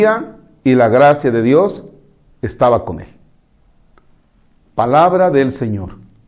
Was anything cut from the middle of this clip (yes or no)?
no